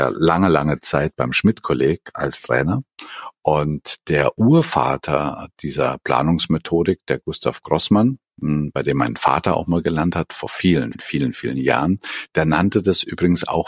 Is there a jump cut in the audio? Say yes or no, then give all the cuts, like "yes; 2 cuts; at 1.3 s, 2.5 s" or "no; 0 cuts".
yes; 2 cuts; at 8.3 s, 10.9 s